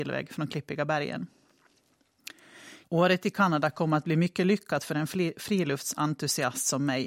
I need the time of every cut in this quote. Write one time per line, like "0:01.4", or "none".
0:02.8